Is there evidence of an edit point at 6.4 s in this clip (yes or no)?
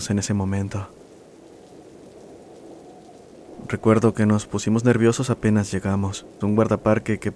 yes